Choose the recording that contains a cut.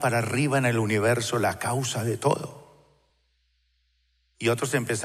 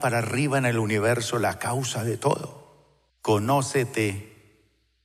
second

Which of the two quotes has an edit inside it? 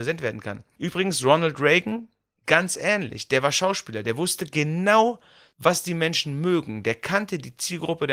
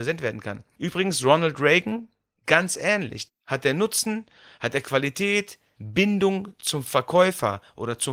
second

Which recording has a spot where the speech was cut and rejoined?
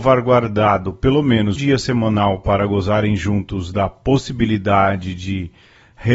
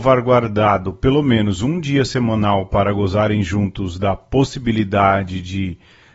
first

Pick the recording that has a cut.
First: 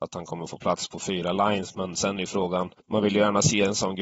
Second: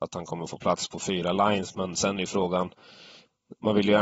first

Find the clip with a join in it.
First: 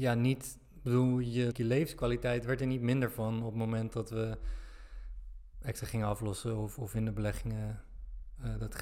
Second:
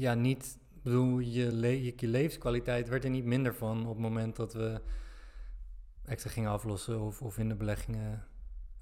first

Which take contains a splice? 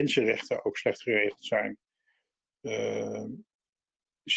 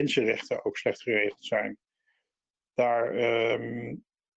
first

